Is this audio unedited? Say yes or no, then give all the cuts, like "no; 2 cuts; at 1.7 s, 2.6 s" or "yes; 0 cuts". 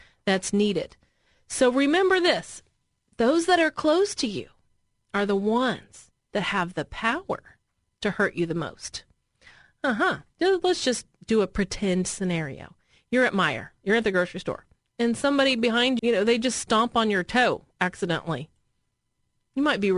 no; 3 cuts; at 10.3 s, 14.8 s, 16.0 s